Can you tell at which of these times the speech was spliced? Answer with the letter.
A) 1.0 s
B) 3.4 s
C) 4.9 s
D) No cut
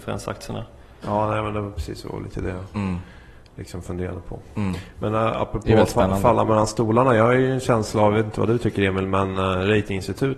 A